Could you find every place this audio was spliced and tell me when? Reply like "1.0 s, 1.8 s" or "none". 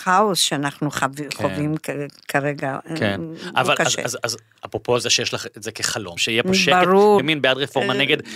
6.2 s, 7.2 s